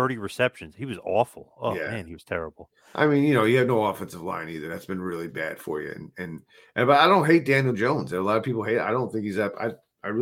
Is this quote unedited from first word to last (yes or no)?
yes